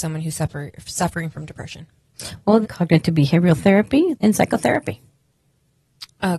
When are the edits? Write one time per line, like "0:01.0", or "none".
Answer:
0:02.6
0:04.1